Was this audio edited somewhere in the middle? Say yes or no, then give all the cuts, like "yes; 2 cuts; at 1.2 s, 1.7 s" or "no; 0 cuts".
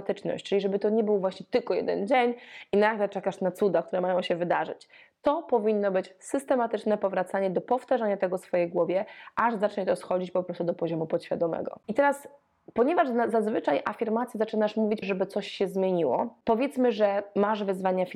yes; 2 cuts; at 11.8 s, 15.0 s